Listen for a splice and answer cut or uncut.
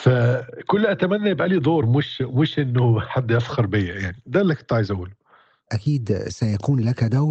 uncut